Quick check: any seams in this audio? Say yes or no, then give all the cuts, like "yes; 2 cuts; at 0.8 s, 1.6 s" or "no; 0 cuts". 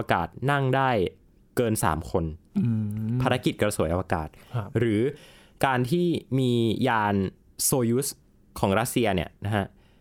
no; 0 cuts